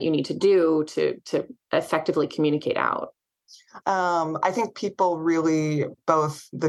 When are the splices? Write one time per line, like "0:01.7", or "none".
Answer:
0:03.8